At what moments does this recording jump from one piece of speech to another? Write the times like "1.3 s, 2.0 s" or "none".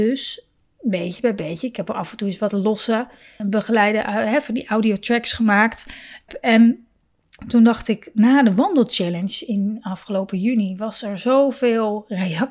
3.4 s, 6.3 s